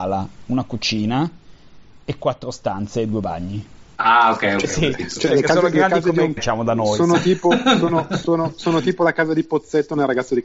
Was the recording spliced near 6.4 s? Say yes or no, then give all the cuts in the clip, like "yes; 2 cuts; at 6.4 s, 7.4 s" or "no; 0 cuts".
yes; 1 cut; at 6.4 s